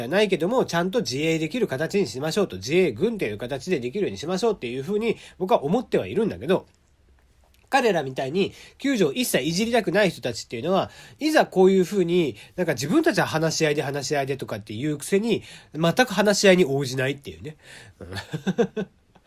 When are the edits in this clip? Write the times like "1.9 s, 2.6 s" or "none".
17.9 s